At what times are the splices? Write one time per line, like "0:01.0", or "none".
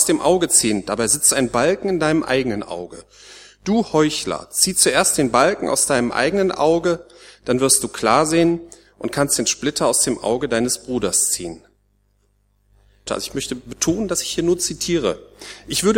0:13.1